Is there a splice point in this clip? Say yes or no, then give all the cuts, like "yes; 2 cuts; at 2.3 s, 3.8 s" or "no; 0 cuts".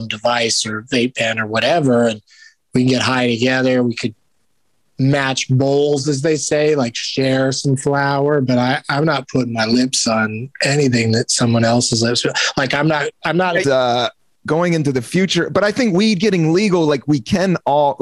yes; 1 cut; at 13.6 s